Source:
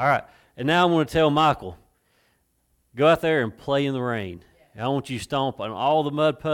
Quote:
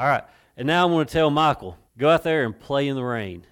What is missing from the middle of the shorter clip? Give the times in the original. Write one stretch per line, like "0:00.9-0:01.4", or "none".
0:01.9-0:02.8